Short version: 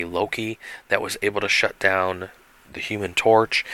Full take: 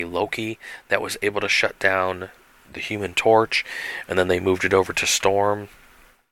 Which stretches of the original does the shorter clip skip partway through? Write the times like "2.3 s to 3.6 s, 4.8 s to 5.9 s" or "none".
none

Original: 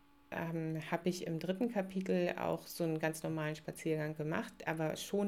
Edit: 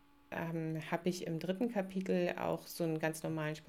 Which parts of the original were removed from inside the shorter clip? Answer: none

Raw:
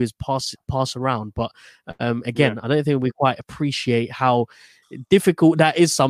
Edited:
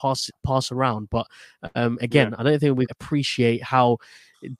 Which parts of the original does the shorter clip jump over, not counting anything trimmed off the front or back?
3.1 s to 3.4 s

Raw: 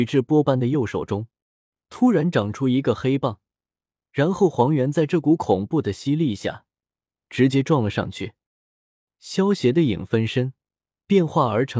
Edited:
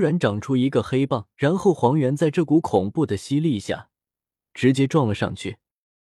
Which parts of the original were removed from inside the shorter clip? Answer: 3.4 s to 4.1 s

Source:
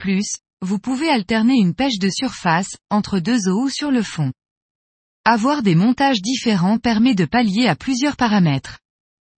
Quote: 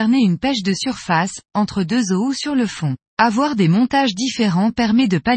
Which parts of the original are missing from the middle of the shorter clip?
4.4 s to 5.1 s

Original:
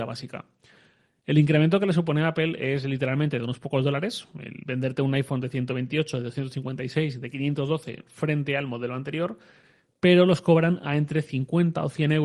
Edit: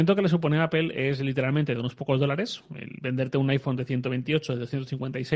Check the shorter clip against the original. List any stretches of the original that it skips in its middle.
none

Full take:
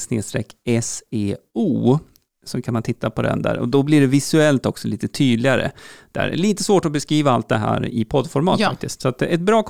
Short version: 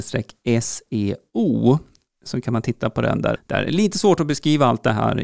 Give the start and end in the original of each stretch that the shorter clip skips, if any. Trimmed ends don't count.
3.6 s to 6.0 s

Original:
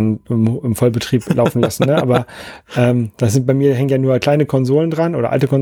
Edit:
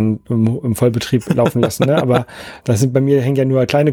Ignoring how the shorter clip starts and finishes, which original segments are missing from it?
2.6 s to 3.1 s

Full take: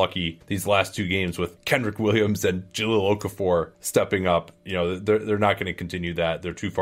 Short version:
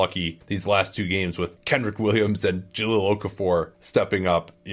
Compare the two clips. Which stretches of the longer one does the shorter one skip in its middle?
none

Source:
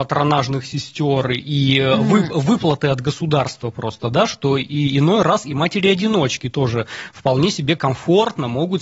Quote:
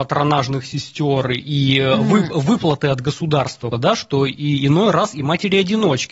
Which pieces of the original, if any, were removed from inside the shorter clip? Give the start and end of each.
3.7 s to 4.0 s

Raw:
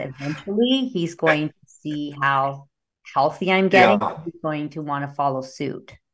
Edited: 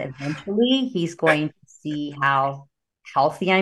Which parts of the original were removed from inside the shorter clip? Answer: none

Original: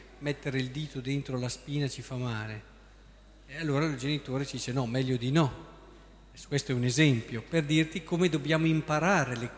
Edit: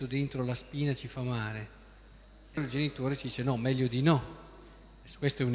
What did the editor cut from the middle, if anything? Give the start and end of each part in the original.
3.5 s to 3.9 s

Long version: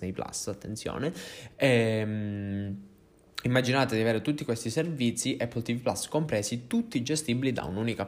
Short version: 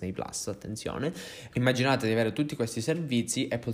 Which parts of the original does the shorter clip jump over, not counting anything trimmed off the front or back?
1.5 s to 3.4 s

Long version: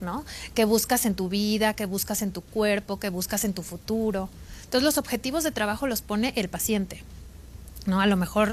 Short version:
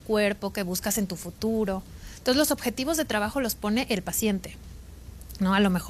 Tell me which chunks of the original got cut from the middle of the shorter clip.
none

